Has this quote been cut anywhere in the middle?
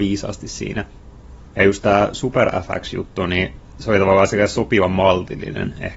no; 0 cuts

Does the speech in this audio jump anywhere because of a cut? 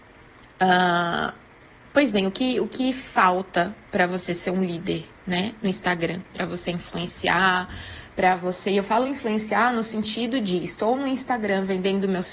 no; 0 cuts

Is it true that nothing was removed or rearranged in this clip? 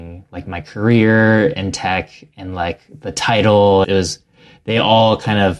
no; 1 cut; at 3.8 s

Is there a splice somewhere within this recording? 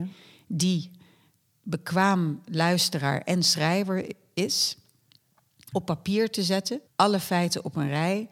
yes; 2 cuts; at 5.7 s, 6.9 s

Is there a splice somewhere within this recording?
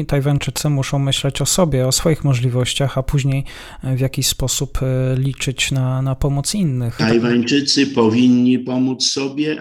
no; 0 cuts

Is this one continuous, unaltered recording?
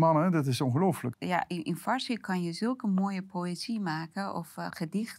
no; 1 cut; at 1.1 s

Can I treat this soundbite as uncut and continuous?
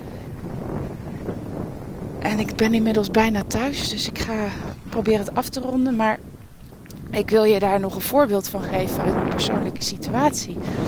yes; 0 cuts

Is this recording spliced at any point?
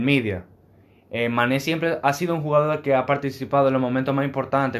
no; 0 cuts

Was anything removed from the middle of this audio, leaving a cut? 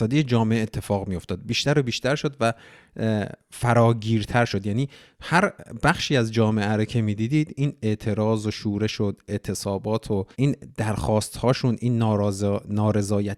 yes; 1 cut; at 10.3 s

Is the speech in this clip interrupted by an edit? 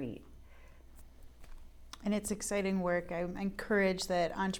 no; 0 cuts

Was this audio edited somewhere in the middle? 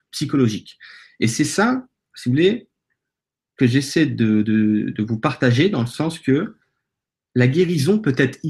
no; 0 cuts

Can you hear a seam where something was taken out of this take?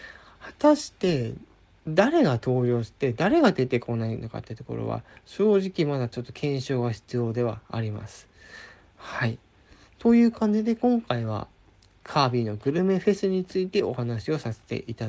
yes; 1 cut; at 12.0 s

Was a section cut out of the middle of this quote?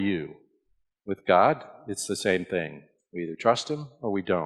yes; 1 cut; at 0.9 s

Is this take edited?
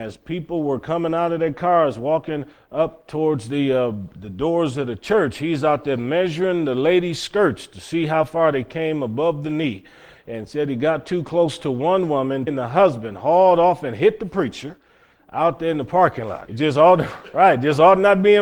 yes; 2 cuts; at 12.5 s, 16.5 s

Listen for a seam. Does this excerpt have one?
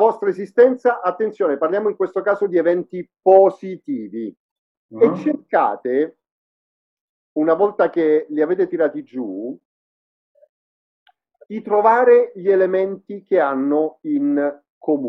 yes; 1 cut; at 4.7 s

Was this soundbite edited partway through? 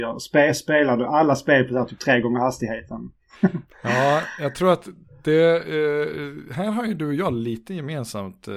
no; 0 cuts

